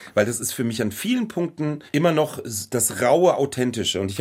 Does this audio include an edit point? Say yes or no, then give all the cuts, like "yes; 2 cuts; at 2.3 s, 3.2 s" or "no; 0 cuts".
yes; 1 cut; at 1.9 s